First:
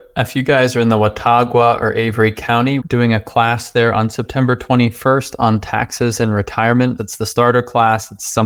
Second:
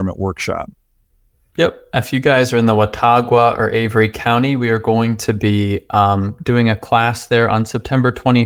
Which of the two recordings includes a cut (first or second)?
first